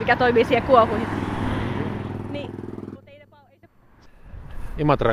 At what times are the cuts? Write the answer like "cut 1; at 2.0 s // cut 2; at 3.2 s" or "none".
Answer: cut 1; at 2.9 s

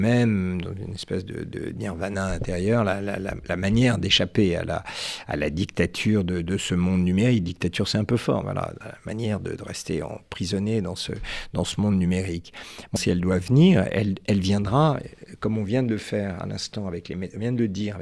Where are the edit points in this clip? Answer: cut 1; at 8.4 s // cut 2; at 13.0 s

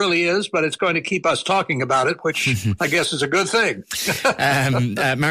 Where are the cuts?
none

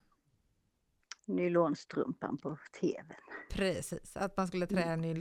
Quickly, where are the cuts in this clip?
cut 1; at 1.2 s

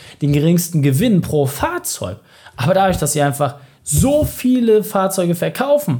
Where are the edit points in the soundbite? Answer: none

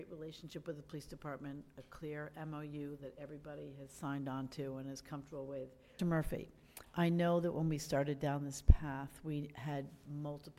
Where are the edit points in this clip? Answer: cut 1; at 6.0 s

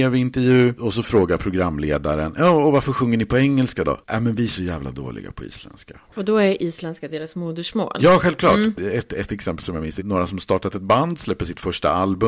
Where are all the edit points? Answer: cut 1; at 8.8 s // cut 2; at 10.0 s

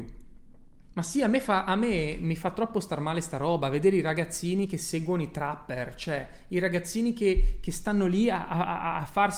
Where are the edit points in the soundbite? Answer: cut 1; at 0.9 s

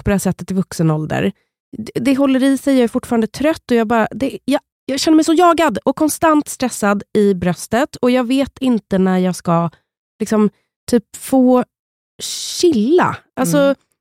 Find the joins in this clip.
cut 1; at 4.7 s

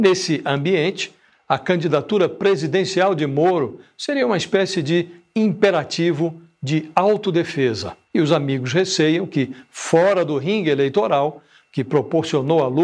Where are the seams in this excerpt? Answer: cut 1; at 8.1 s // cut 2; at 11.6 s

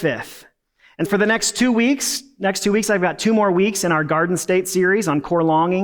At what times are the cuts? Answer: cut 1; at 1.1 s

